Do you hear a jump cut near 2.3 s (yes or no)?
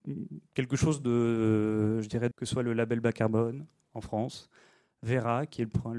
yes